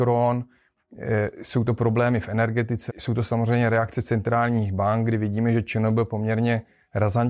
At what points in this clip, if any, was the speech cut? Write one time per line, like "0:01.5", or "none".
0:02.9